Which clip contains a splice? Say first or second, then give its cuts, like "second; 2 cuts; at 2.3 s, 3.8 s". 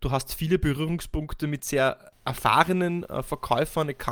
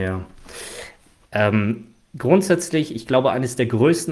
second; 1 cut; at 1.3 s